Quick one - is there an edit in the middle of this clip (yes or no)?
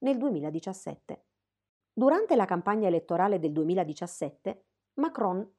yes